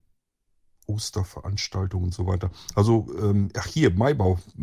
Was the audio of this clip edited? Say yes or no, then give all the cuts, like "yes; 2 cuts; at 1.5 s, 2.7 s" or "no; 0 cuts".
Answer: no; 0 cuts